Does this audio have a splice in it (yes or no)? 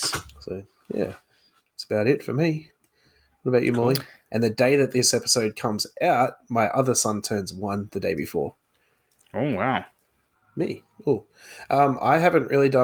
yes